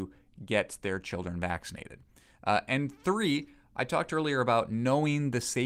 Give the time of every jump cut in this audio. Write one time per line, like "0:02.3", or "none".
none